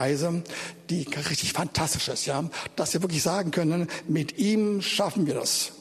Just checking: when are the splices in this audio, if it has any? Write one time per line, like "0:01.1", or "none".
none